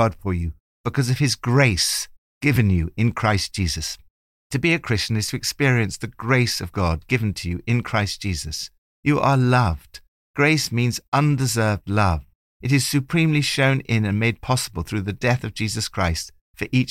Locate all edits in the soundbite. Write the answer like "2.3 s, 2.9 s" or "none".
none